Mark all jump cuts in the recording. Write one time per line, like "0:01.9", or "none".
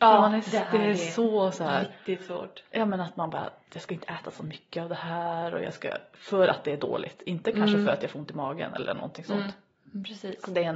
none